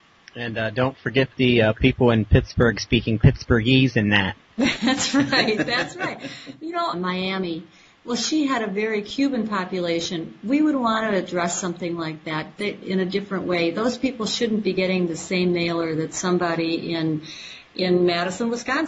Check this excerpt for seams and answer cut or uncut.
cut